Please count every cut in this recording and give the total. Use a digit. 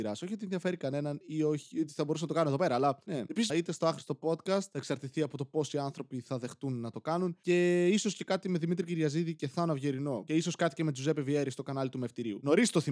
1